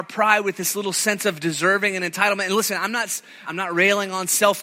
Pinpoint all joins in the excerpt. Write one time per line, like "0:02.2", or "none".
0:03.5